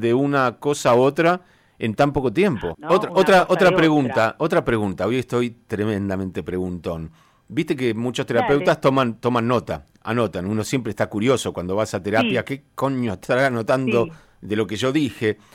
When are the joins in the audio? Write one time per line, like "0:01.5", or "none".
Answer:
0:02.7